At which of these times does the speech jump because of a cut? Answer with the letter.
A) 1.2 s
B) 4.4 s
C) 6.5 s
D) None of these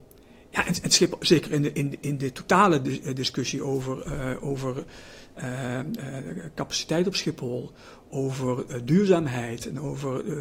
D